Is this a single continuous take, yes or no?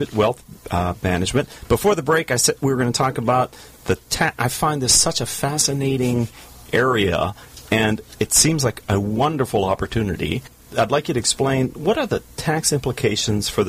yes